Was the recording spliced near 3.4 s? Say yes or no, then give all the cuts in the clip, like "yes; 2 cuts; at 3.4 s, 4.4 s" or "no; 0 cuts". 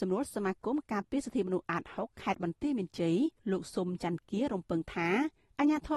yes; 1 cut; at 3.4 s